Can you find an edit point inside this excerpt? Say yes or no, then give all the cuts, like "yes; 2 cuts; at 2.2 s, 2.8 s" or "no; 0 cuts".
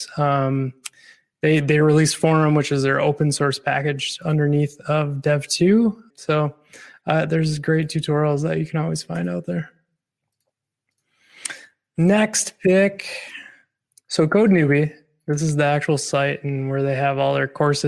yes; 2 cuts; at 6.1 s, 13.9 s